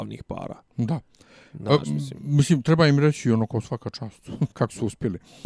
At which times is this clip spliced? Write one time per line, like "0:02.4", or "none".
0:04.5